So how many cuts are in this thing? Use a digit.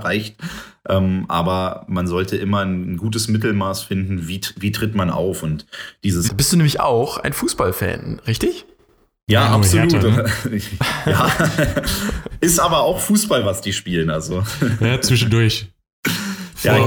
1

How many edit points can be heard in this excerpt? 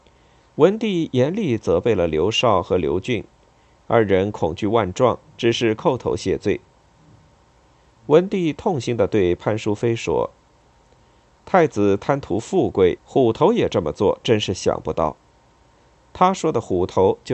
1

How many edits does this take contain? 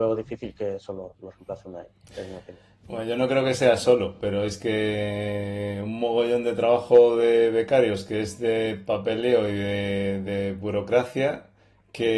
0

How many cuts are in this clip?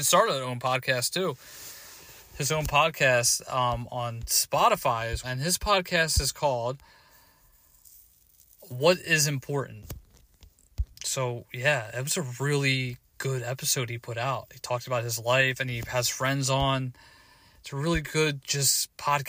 1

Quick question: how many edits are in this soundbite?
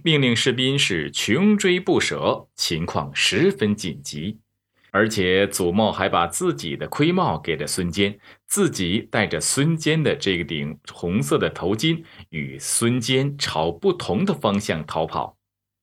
1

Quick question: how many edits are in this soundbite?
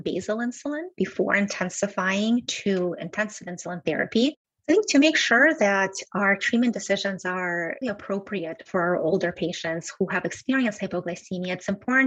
2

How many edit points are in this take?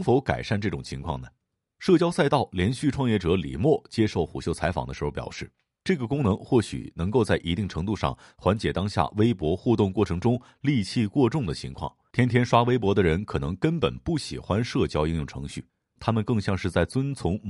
2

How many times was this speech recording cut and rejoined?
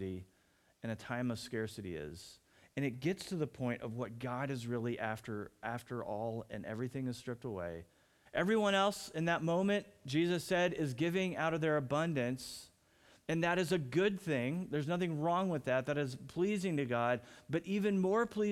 1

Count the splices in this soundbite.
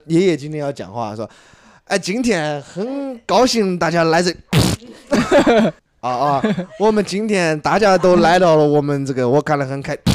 1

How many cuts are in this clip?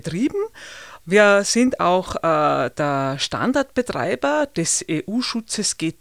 1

